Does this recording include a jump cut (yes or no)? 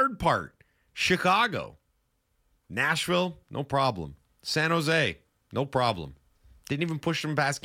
no